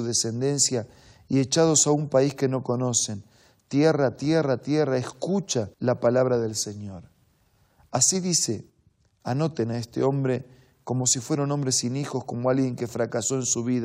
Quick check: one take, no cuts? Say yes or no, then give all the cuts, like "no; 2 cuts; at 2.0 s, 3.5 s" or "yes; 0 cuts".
no; 1 cut; at 5.7 s